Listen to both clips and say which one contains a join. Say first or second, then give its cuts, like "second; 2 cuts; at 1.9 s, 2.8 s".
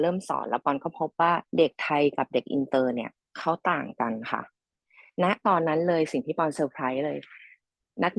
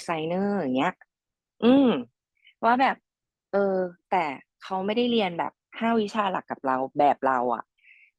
first; 1 cut; at 1.5 s